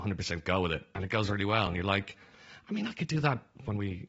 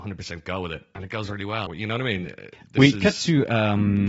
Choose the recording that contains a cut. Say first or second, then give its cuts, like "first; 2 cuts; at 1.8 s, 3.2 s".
second; 1 cut; at 1.7 s